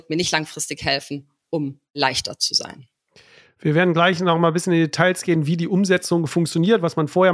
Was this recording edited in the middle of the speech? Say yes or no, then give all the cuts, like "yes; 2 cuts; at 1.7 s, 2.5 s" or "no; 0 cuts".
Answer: no; 0 cuts